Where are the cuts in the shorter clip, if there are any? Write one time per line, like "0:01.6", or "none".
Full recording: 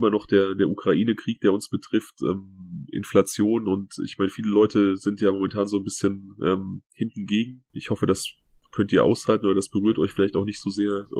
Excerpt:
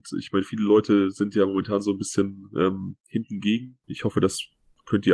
none